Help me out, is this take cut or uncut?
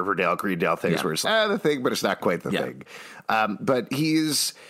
cut